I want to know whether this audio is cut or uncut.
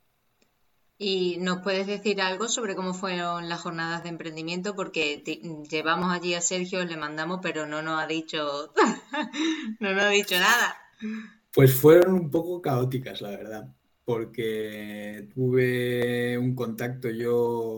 uncut